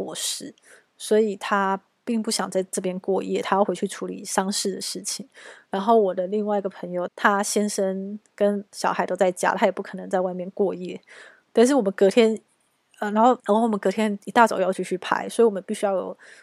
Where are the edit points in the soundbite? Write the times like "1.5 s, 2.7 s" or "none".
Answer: 7.1 s, 13.4 s